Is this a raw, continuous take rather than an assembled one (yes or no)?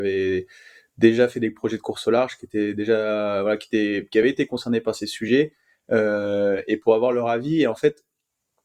yes